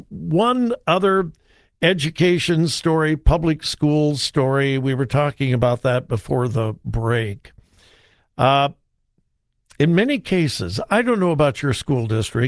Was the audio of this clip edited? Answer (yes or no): no